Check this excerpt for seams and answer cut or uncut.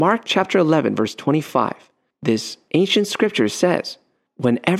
uncut